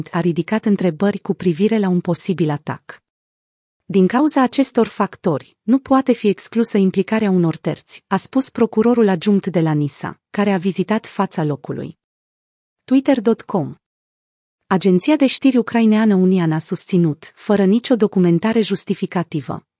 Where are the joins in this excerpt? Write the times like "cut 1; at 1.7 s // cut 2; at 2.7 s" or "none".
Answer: none